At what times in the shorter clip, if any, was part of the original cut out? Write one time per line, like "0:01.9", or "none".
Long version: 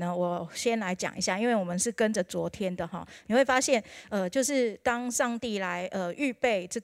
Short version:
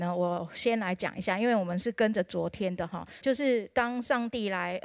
0:03.2